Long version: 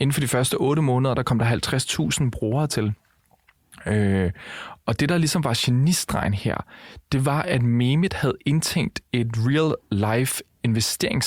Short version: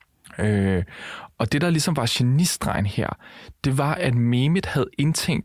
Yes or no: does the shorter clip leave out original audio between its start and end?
no